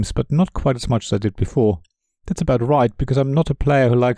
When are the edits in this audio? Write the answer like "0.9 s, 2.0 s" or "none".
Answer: none